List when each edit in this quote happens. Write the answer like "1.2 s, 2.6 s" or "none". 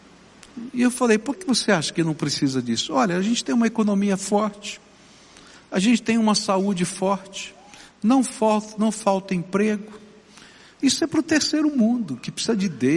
1.4 s